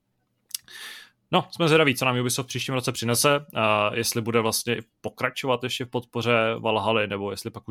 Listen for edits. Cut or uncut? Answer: uncut